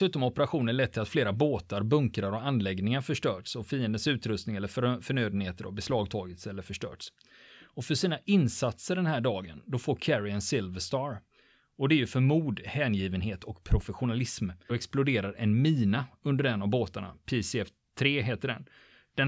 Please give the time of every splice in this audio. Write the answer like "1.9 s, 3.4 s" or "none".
14.7 s